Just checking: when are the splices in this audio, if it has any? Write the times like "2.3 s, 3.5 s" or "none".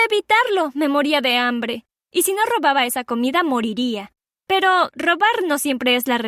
4.9 s